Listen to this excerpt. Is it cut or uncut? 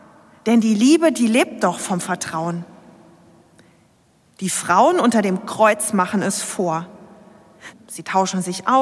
cut